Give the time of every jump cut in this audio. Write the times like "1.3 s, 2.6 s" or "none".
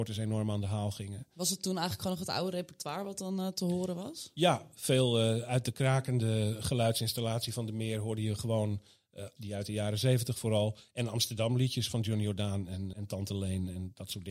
9.4 s, 12.9 s